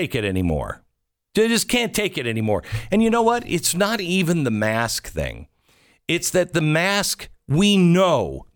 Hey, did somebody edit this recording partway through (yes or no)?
no